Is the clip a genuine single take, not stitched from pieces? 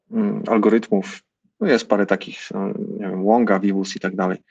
no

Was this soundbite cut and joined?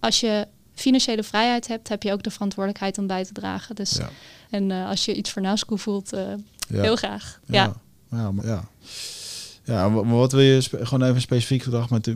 yes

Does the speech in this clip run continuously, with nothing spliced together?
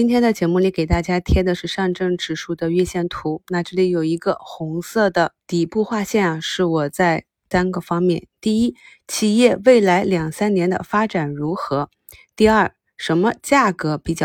no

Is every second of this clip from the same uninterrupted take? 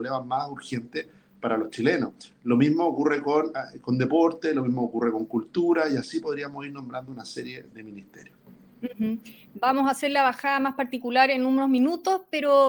yes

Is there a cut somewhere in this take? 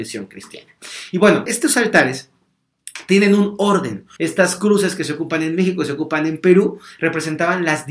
yes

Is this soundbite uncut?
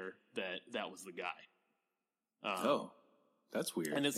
yes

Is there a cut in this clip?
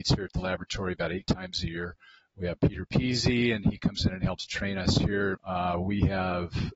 yes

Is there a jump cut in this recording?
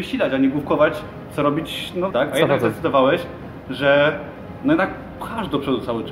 yes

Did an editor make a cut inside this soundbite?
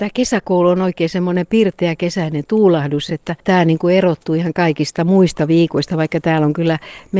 no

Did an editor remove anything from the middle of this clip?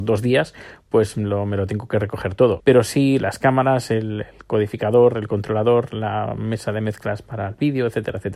yes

